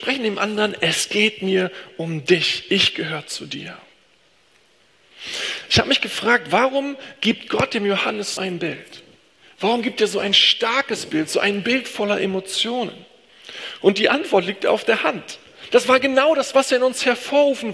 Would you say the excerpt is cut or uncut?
cut